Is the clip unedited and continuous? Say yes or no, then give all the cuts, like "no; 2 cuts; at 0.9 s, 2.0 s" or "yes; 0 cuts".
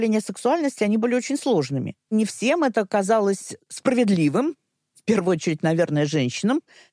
no; 1 cut; at 2.1 s